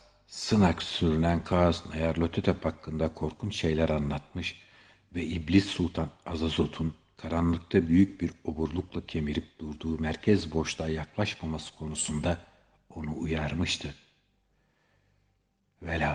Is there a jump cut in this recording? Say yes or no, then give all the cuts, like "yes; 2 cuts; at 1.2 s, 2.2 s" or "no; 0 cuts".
no; 0 cuts